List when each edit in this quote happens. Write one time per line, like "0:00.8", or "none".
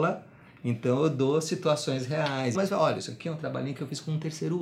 0:02.5